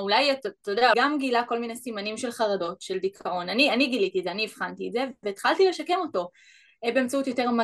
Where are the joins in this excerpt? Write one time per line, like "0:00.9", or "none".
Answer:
0:00.9